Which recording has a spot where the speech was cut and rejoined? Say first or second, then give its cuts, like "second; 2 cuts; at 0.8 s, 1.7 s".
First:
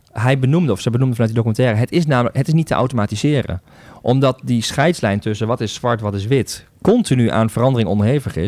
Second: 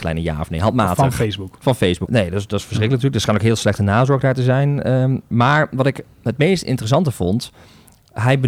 second; 1 cut; at 2.1 s